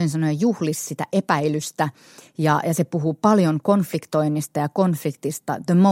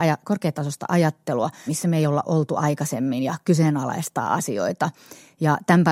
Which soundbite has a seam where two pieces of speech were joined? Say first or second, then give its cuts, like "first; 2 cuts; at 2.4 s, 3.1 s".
second; 1 cut; at 1.7 s